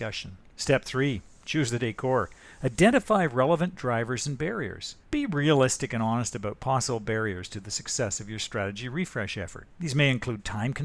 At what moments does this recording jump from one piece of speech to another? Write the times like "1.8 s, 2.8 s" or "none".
none